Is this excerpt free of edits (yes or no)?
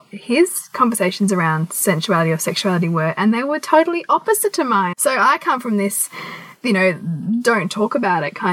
no